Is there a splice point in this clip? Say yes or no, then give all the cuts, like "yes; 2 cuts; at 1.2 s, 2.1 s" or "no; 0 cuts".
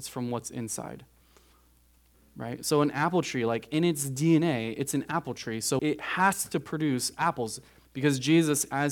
yes; 2 cuts; at 5.8 s, 7.9 s